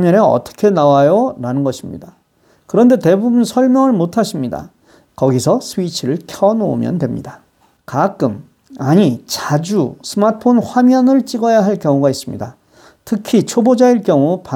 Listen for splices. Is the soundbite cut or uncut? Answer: cut